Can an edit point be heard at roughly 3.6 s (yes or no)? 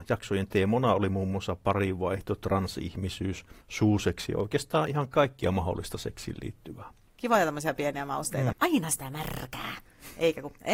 yes